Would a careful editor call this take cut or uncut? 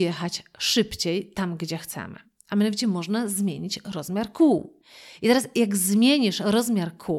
uncut